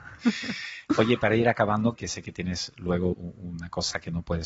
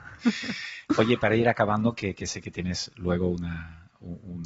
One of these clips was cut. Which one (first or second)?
first